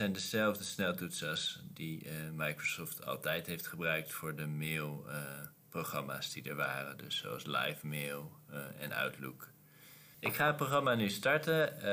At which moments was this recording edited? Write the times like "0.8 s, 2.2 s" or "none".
10.1 s